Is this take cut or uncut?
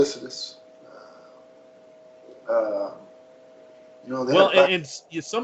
uncut